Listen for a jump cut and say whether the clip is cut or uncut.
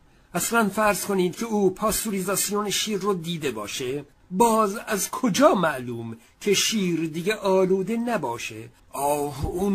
cut